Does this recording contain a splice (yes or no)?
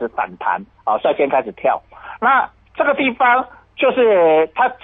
no